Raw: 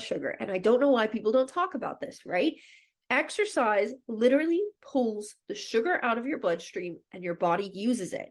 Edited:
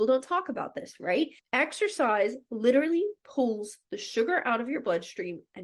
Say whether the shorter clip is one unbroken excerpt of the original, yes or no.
no